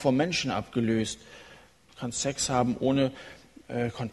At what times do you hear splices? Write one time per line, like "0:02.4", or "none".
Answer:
0:01.9